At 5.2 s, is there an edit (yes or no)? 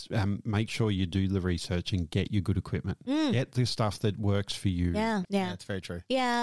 yes